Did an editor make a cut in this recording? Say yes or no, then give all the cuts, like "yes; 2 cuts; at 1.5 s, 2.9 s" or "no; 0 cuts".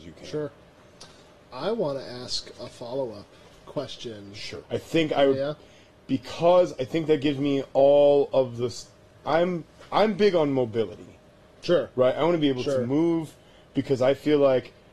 yes; 1 cut; at 4.6 s